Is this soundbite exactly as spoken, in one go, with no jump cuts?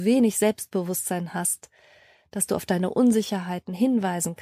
yes; 0 cuts

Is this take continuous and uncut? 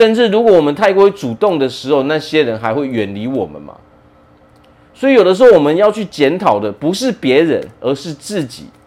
yes; 0 cuts

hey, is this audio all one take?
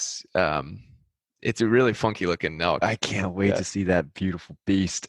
no; 1 cut; at 2.8 s

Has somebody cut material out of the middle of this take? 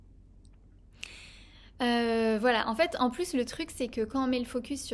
no; 0 cuts

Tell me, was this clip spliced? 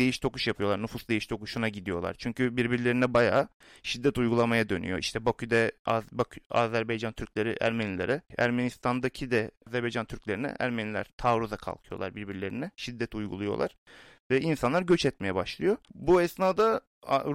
no; 0 cuts

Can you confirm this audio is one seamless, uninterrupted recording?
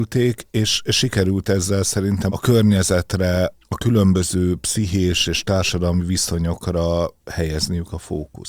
no; 2 cuts; at 2.3 s, 3.5 s

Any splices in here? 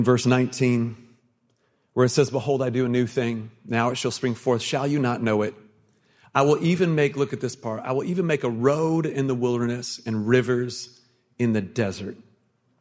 no; 0 cuts

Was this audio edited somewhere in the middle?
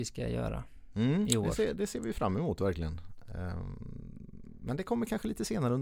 no; 0 cuts

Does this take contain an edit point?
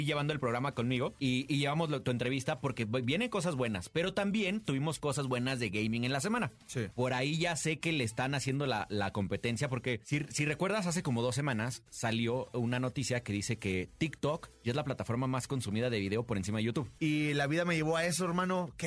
yes; 2 cuts; at 6.9 s, 17.0 s

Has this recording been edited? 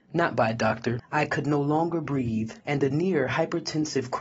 yes; 2 cuts; at 1.0 s, 2.6 s

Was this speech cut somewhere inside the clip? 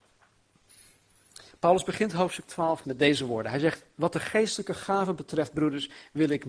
yes; 1 cut; at 2.8 s

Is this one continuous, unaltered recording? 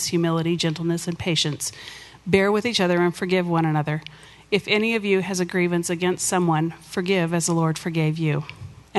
yes; 0 cuts

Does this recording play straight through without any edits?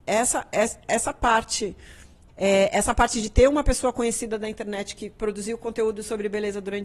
no; 1 cut; at 2.3 s

